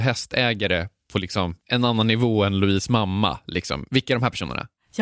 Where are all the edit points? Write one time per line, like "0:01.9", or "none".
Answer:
0:01.6
0:03.9